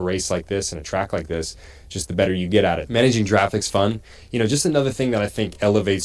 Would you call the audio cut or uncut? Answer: cut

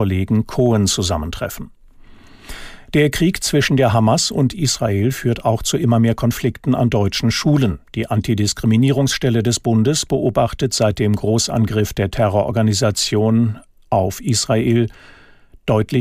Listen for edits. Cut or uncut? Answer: uncut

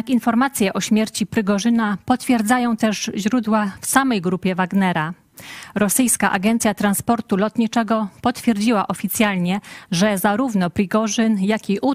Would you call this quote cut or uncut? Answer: uncut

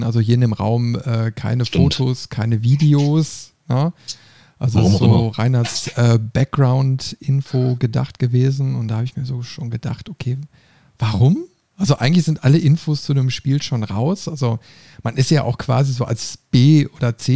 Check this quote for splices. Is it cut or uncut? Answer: uncut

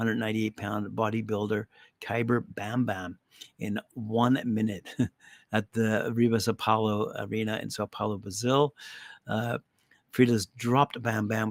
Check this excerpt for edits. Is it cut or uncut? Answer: uncut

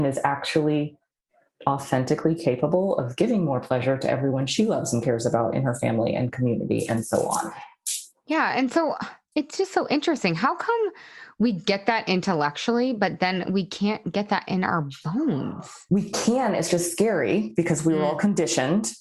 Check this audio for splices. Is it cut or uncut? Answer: uncut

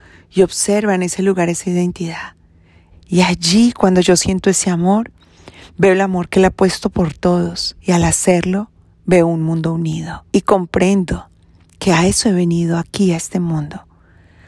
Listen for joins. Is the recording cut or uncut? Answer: cut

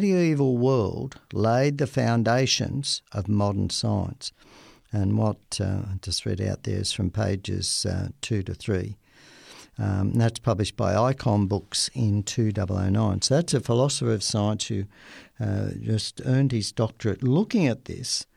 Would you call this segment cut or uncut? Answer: uncut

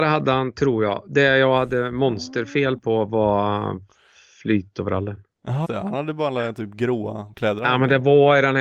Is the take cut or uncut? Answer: cut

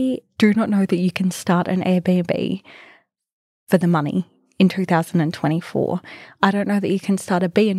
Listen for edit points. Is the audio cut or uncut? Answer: uncut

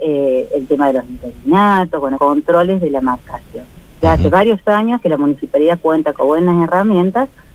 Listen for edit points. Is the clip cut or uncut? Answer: cut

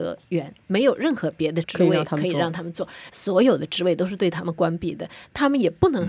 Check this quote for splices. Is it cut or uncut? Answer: cut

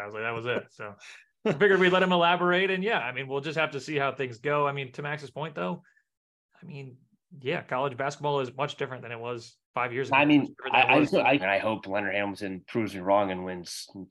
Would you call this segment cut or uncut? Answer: cut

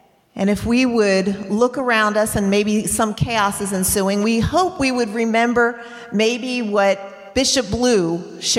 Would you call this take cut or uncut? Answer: uncut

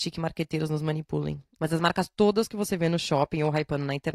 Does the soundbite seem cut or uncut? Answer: cut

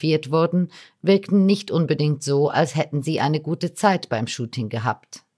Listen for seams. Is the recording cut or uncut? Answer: uncut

